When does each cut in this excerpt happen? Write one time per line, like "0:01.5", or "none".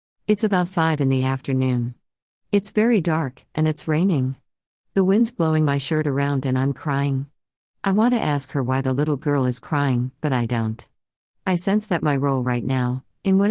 none